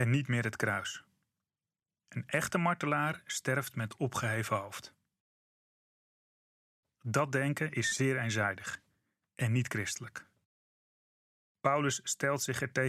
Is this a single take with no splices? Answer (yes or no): no